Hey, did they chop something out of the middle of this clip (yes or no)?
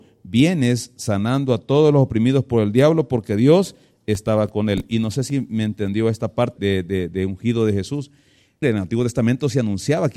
yes